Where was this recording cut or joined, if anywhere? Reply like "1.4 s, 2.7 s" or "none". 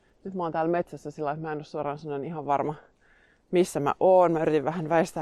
none